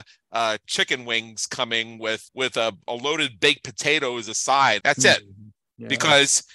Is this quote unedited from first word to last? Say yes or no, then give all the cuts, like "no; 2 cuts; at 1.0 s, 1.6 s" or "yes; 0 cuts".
no; 2 cuts; at 2.3 s, 4.8 s